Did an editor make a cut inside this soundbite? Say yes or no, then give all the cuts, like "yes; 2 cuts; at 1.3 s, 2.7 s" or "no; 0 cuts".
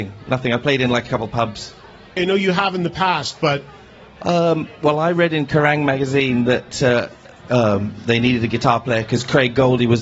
yes; 1 cut; at 2.2 s